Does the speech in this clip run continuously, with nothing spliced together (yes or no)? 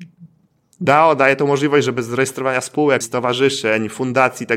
no